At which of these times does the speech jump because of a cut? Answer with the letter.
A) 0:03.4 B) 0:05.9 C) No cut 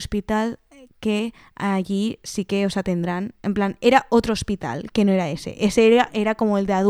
C